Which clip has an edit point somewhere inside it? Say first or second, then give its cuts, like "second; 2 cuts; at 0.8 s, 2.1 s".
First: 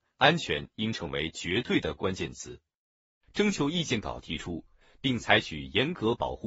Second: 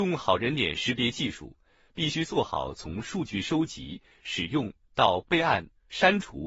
first; 2 cuts; at 3.2 s, 4.8 s